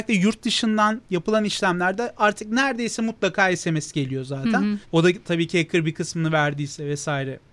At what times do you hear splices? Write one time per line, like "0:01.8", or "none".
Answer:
0:04.8